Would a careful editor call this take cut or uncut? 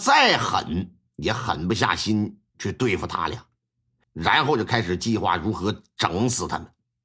cut